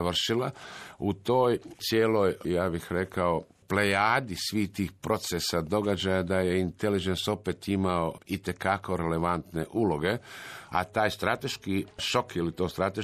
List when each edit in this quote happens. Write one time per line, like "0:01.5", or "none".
0:10.7